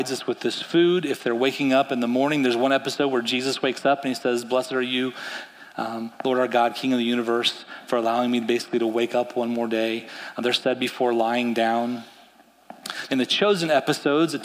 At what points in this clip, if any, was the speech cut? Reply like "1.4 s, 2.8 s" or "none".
13.1 s